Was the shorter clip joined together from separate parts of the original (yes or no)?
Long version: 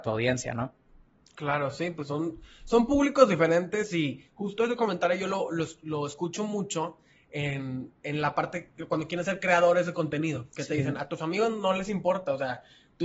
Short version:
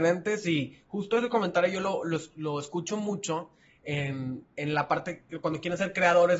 no